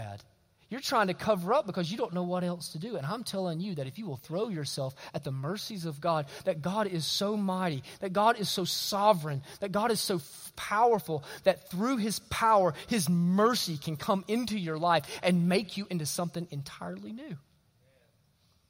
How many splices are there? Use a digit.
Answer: 0